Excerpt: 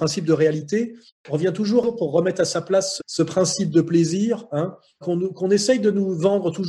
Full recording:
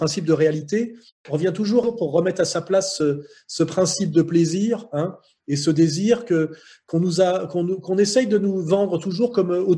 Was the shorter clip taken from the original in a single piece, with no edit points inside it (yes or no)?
no